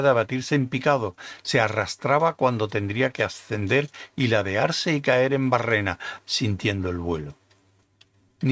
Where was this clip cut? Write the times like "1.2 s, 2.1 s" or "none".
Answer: 6.2 s